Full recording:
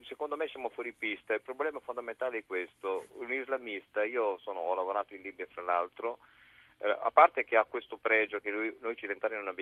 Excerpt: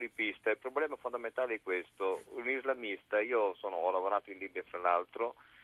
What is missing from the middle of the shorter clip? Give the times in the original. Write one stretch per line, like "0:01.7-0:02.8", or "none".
none